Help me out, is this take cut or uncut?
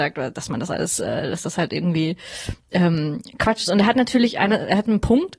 uncut